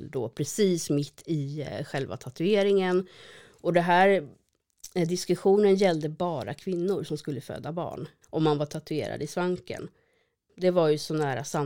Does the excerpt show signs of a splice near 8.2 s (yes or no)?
yes